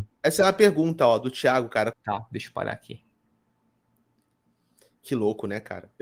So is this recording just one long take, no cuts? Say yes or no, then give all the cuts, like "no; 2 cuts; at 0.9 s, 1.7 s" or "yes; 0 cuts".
no; 1 cut; at 1.9 s